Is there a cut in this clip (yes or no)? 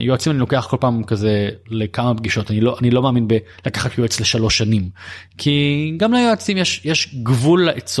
no